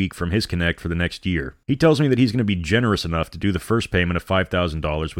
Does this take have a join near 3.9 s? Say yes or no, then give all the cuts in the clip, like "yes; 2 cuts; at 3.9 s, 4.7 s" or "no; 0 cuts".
no; 1 cut; at 1.6 s